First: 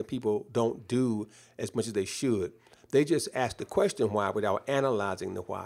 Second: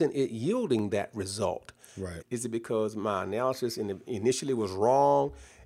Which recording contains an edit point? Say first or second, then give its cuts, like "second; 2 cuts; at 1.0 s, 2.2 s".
second; 1 cut; at 2.2 s